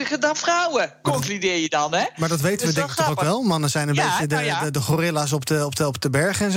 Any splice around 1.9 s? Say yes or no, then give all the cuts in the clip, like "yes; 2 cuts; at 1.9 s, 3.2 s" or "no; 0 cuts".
no; 0 cuts